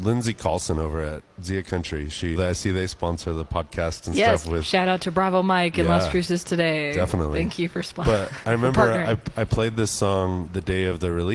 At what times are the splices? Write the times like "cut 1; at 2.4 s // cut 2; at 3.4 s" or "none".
cut 1; at 2.4 s